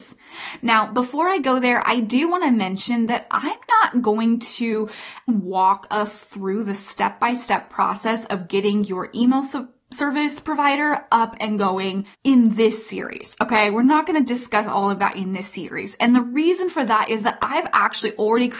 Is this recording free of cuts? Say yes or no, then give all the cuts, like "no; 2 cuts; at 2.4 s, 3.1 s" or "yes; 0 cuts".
no; 2 cuts; at 5.3 s, 12.1 s